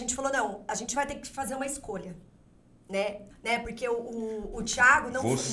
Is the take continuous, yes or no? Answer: no